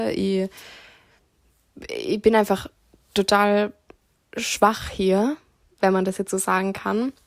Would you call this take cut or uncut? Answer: uncut